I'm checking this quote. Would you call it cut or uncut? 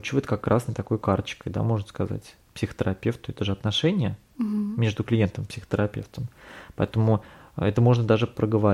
uncut